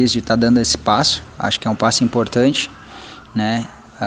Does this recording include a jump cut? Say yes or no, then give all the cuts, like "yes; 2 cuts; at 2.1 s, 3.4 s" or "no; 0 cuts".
no; 0 cuts